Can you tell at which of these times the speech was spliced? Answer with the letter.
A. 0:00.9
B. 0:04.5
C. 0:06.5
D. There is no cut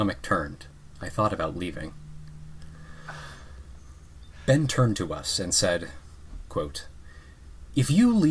C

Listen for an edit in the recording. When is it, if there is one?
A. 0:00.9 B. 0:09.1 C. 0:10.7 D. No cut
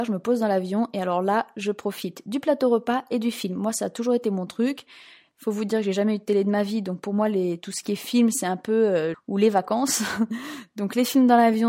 B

